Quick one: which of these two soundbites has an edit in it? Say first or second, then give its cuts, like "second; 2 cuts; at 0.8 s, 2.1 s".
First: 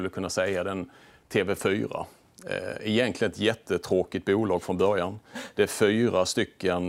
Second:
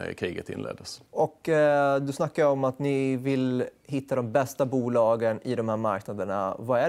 second; 1 cut; at 1.1 s